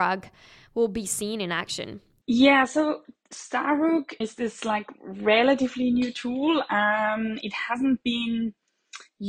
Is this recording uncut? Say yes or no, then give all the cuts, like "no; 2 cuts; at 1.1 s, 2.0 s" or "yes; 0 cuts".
no; 2 cuts; at 2.2 s, 4.2 s